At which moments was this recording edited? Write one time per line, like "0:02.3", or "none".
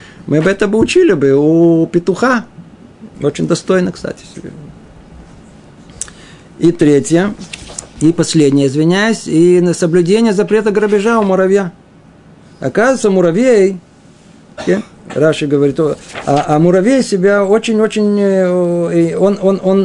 0:03.1